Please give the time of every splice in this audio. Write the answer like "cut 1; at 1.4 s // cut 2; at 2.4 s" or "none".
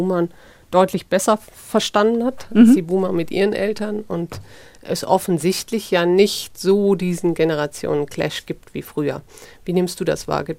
none